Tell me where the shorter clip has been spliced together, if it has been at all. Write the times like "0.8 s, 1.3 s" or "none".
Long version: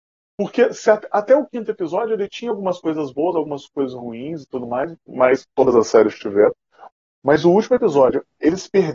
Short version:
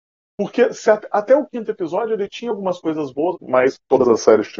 3.3 s